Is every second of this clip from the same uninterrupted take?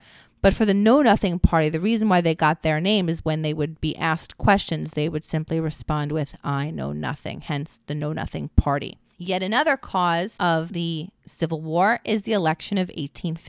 yes; 0 cuts

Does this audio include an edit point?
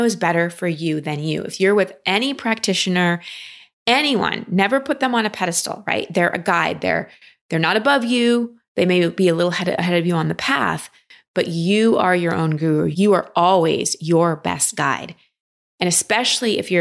no; 0 cuts

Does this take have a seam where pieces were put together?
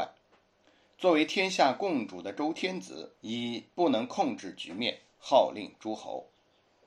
yes; 1 cut; at 3.2 s

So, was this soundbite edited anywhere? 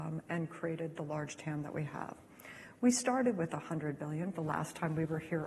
yes; 1 cut; at 4.3 s

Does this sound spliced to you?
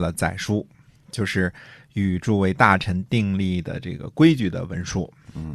no; 0 cuts

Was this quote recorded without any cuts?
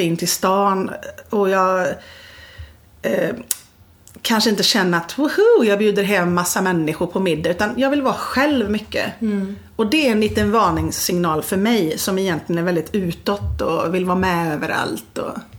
yes; 0 cuts

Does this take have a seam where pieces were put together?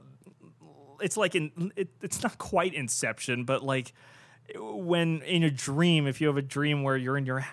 no; 0 cuts

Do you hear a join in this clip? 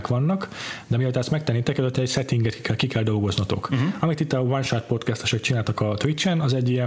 no; 0 cuts

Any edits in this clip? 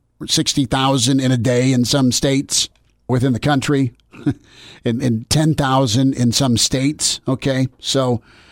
yes; 1 cut; at 3.1 s

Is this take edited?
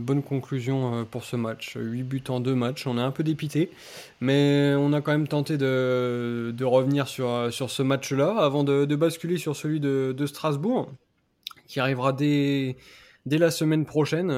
no; 0 cuts

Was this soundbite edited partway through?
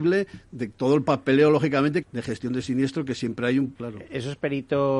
yes; 2 cuts; at 2.0 s, 3.7 s

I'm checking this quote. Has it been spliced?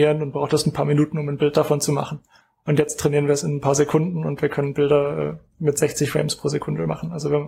no; 0 cuts

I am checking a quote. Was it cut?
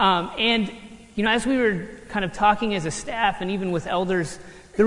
no; 0 cuts

